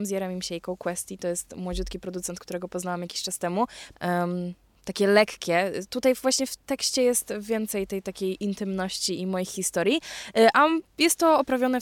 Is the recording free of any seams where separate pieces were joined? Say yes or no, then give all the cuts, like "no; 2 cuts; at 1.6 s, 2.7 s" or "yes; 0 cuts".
no; 1 cut; at 3.9 s